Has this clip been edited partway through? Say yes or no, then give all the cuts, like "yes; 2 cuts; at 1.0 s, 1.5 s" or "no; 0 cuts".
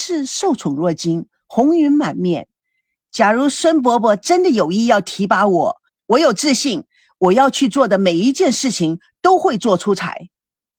yes; 1 cut; at 5.9 s